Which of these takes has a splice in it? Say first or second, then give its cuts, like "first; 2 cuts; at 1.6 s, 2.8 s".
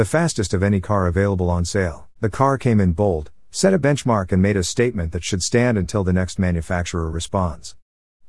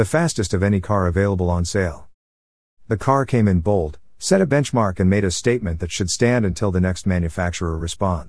first; 1 cut; at 2.2 s